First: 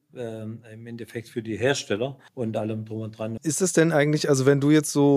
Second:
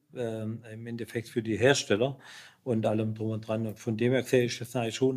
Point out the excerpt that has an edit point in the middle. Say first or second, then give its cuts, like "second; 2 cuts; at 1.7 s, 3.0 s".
first; 2 cuts; at 2.3 s, 3.4 s